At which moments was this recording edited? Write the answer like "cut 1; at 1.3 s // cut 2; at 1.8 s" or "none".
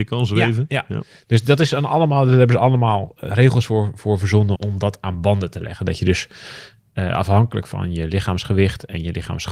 cut 1; at 4.6 s